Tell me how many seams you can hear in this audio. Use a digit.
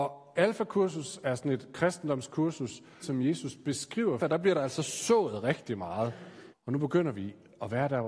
3